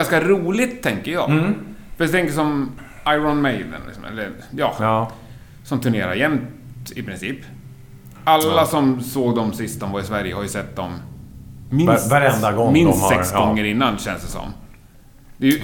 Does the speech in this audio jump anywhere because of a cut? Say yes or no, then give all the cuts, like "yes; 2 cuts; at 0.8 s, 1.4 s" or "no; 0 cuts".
no; 0 cuts